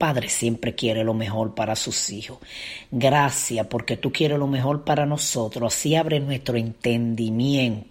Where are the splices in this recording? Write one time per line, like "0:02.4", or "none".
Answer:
none